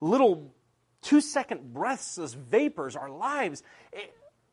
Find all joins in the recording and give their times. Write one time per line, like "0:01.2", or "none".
none